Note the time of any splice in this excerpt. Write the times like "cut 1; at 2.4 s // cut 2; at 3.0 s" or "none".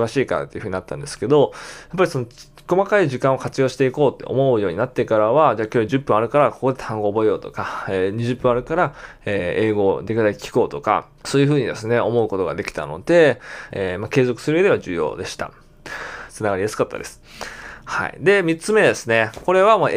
cut 1; at 11.2 s // cut 2; at 13.7 s // cut 3; at 16.3 s

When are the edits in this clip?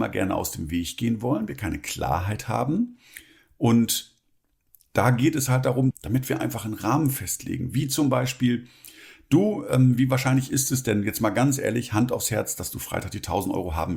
cut 1; at 5.9 s

